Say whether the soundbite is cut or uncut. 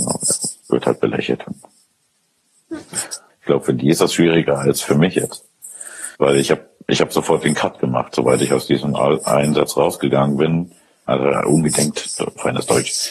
cut